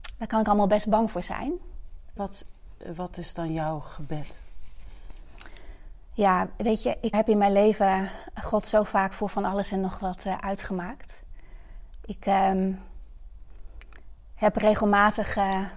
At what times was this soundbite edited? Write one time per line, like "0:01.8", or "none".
0:02.2
0:07.1